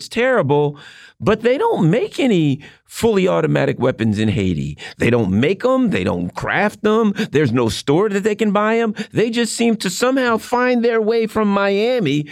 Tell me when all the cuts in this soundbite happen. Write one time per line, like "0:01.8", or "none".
none